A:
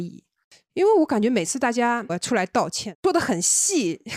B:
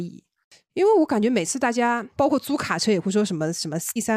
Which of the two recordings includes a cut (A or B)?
A